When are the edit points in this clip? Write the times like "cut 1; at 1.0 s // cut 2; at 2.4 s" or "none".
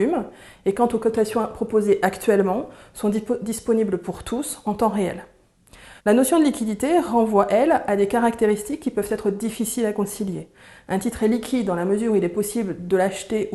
cut 1; at 6.0 s